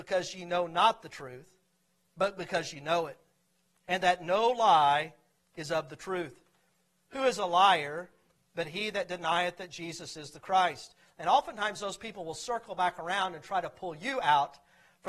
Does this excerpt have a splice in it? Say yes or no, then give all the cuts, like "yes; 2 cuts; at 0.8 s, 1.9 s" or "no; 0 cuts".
yes; 1 cut; at 11.0 s